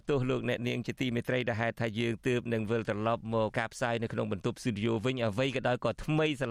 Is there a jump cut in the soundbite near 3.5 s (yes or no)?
yes